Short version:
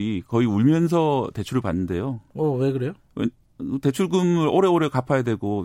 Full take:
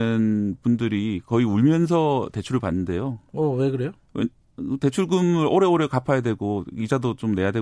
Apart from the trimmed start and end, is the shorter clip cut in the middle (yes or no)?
no